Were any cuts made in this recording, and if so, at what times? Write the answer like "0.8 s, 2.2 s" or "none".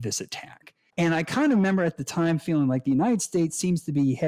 0.9 s